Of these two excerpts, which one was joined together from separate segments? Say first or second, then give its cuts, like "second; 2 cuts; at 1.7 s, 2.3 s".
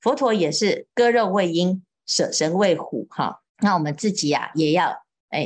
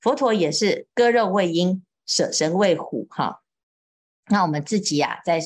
first; 2 cuts; at 3.5 s, 4.5 s